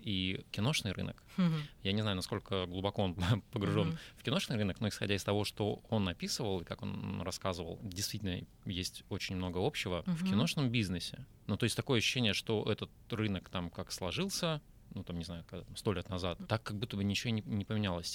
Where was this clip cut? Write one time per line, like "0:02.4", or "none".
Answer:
0:10.1